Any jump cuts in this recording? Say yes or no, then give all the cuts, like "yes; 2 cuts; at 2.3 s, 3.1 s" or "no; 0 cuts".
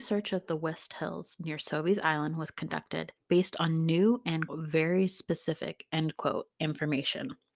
yes; 1 cut; at 4.5 s